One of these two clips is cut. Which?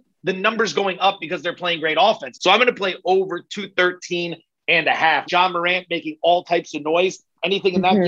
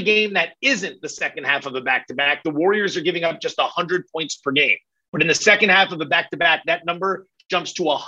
first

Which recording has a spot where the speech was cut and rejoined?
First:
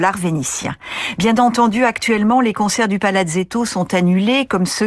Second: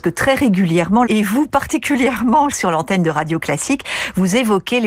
second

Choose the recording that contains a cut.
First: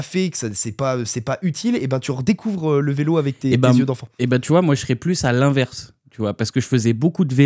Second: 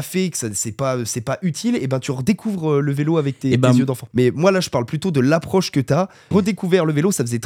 second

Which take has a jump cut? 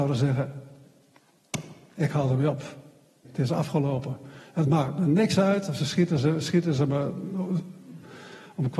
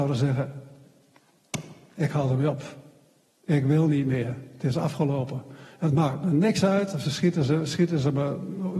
first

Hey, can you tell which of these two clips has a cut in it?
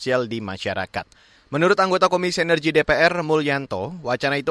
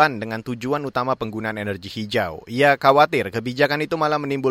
first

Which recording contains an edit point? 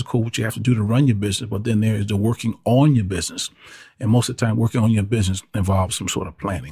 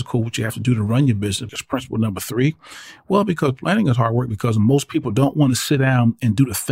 second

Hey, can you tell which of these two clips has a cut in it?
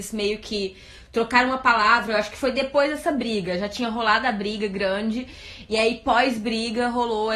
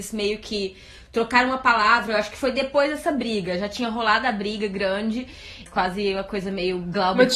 second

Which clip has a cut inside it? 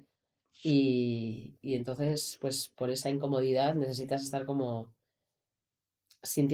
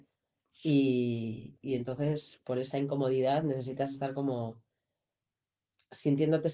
second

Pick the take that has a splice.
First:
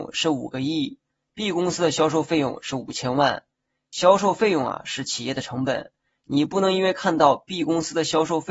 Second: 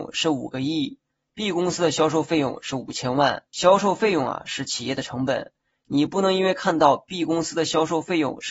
second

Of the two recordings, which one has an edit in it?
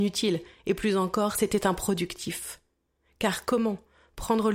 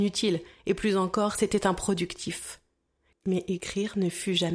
second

